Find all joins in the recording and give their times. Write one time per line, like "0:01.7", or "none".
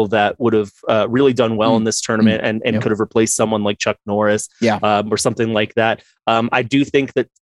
none